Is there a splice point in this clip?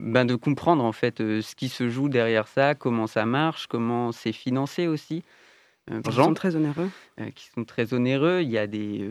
yes; 1 cut; at 6.0 s

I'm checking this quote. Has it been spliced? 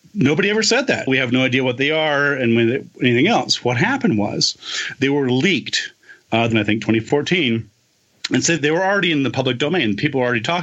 yes; 3 cuts; at 1.1 s, 6.5 s, 8.6 s

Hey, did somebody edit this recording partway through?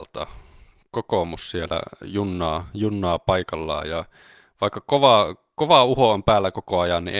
no; 0 cuts

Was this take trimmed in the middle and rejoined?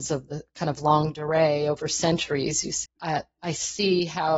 yes; 1 cut; at 2.9 s

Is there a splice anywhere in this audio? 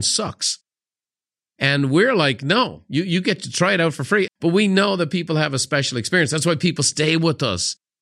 yes; 1 cut; at 4.3 s

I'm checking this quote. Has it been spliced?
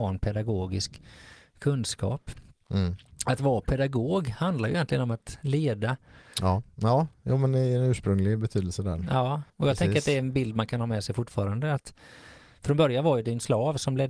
yes; 2 cuts; at 6.6 s, 9.5 s

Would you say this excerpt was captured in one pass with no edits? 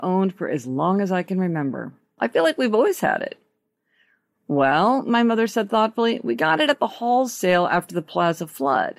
no; 1 cut; at 2.2 s

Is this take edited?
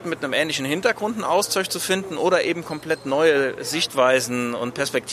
no; 0 cuts

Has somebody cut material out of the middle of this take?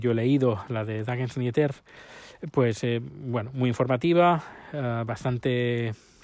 no; 0 cuts

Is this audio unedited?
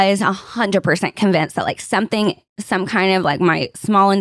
yes; 0 cuts

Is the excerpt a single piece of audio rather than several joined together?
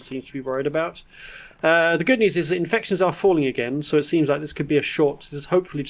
yes; 0 cuts

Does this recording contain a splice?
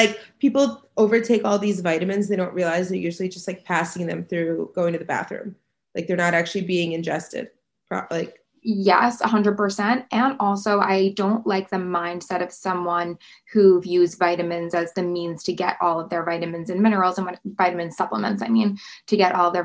no; 0 cuts

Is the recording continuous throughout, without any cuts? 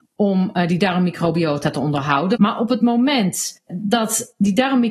no; 2 cuts; at 2.4 s, 3.7 s

